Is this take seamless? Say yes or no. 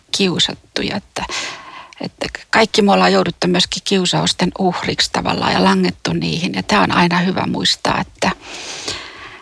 yes